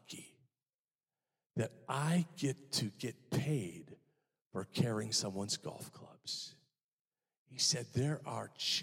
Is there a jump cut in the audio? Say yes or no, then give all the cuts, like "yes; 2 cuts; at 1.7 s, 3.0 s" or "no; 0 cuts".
no; 0 cuts